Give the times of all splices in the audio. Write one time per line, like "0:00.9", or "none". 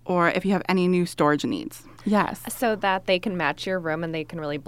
0:02.0